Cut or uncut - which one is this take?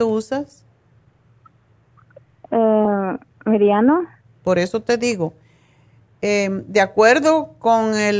cut